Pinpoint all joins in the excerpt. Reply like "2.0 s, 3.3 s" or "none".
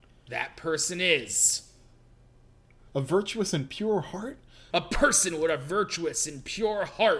2.9 s, 4.7 s

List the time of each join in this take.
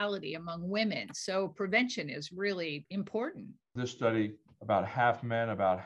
none

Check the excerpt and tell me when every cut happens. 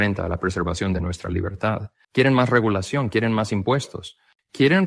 2.0 s

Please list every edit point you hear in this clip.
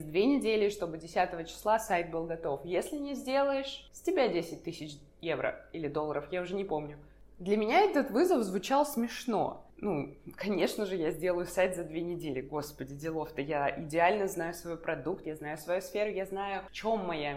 15.2 s

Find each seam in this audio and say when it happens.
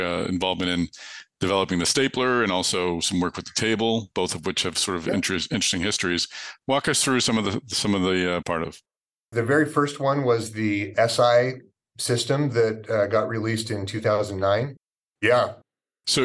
8.4 s, 15.0 s

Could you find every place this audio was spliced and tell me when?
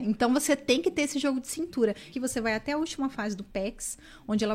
2.1 s

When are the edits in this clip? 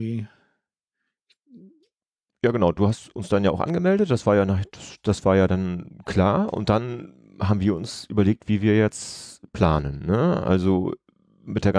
none

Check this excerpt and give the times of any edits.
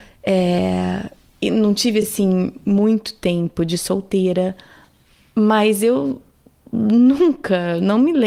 none

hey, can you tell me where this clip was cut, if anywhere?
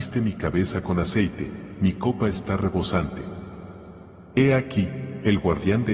4.3 s

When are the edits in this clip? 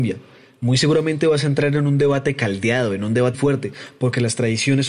3.3 s

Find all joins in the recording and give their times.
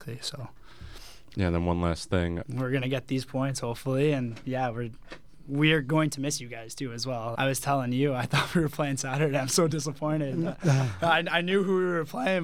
1.3 s, 2.4 s, 7.3 s

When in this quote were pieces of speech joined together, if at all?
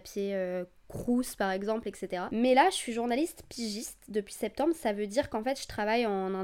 none

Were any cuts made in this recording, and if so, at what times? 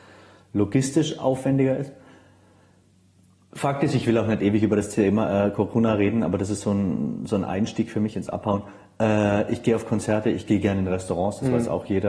none

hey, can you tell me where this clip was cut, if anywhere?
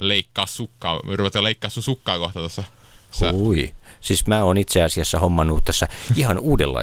none

